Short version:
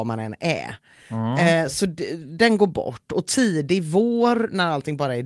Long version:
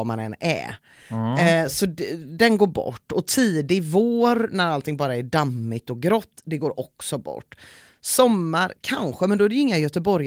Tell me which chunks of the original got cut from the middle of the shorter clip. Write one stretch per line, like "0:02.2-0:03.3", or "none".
none